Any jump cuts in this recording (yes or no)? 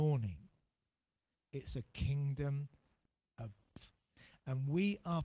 yes